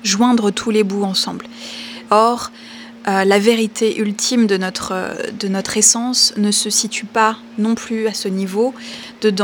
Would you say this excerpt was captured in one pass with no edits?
no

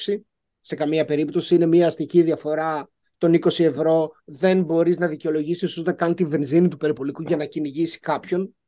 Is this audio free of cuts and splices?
no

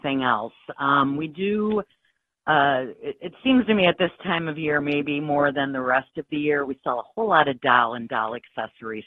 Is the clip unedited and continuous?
yes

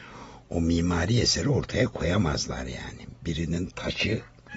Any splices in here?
no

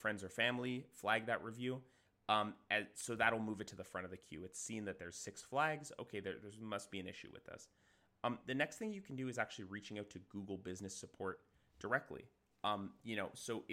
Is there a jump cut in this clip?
no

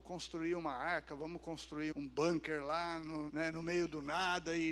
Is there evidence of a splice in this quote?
yes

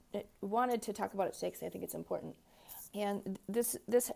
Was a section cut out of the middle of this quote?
yes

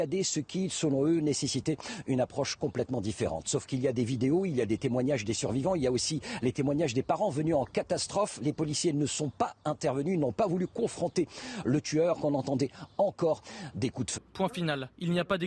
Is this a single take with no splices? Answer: no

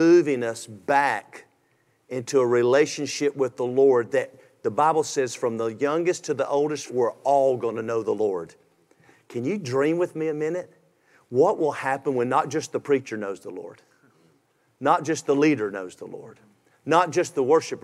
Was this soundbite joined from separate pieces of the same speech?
yes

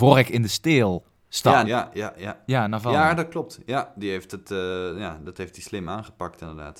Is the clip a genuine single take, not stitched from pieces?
no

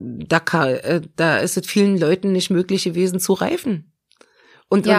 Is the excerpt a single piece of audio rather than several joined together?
yes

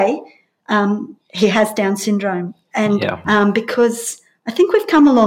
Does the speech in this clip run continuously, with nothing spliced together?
no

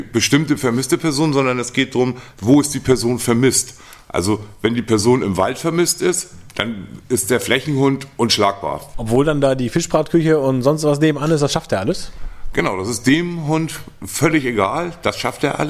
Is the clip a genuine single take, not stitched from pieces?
no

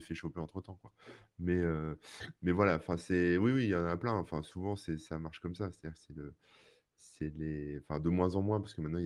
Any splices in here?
no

